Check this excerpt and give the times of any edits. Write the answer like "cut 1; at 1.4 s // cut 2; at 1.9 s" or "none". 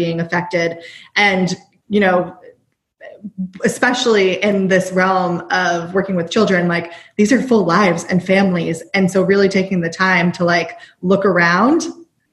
none